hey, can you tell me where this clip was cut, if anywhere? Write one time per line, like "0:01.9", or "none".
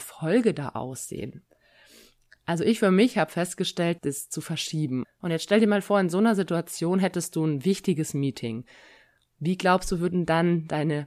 0:04.0
0:05.0